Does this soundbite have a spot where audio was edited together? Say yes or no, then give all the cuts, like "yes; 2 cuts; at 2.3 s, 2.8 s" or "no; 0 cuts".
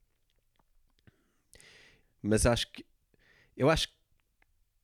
yes; 1 cut; at 2.0 s